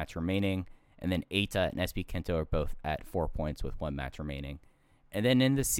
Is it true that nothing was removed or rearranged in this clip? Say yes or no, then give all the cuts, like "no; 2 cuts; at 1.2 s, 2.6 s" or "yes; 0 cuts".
yes; 0 cuts